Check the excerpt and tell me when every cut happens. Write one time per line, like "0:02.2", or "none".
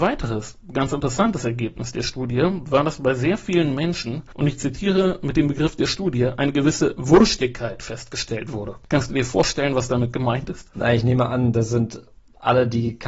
none

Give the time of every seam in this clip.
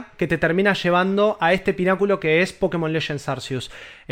none

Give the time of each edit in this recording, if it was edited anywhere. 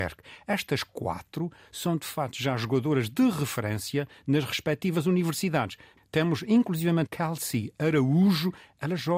0:06.0
0:07.1

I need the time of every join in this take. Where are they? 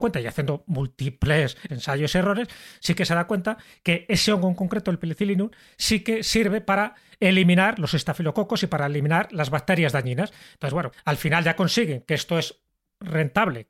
0:01.7
0:10.9

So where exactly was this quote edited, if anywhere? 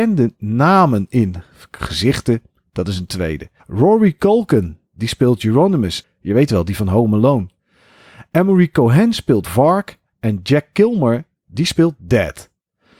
0:03.6
0:06.0
0:11.4

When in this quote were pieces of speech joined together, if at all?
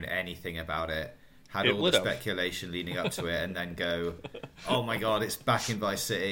none

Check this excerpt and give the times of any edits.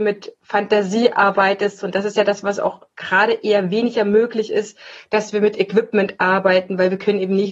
none

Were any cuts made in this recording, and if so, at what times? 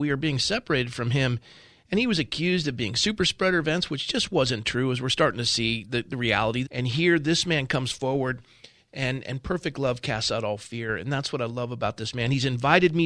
0:06.6

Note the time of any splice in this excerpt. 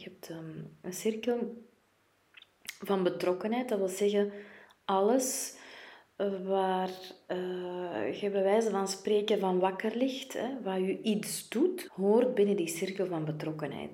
0:11.9

